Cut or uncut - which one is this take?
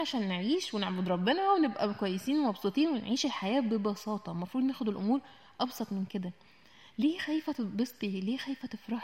uncut